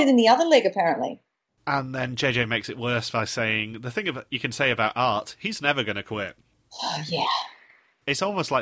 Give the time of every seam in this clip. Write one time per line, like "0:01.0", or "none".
none